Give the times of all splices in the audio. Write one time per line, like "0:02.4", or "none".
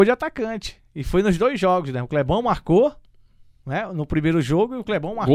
none